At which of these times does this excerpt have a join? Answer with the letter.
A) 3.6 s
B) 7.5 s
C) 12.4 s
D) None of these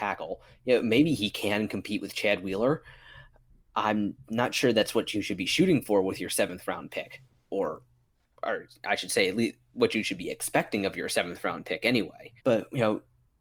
C